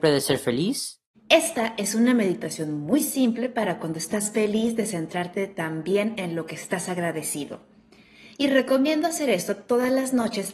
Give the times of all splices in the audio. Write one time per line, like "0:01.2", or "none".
0:01.1